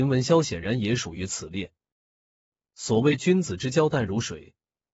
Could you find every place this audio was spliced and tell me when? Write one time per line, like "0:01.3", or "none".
0:02.6